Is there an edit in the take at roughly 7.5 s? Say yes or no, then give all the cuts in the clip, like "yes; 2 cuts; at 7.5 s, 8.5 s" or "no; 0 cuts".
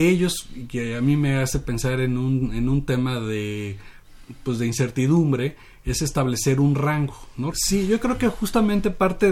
yes; 1 cut; at 7.5 s